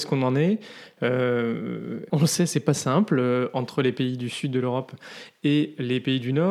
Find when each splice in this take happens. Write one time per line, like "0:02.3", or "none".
0:02.1